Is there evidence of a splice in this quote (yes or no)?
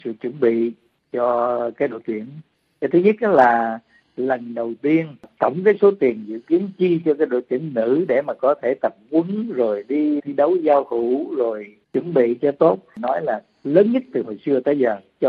yes